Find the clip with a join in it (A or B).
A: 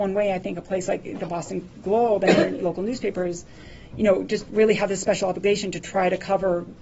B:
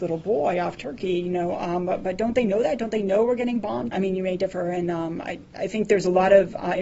B